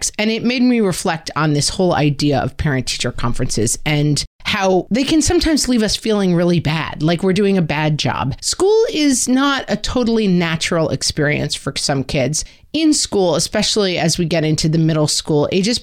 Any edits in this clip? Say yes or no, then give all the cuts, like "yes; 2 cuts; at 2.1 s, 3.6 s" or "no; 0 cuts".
yes; 1 cut; at 8.4 s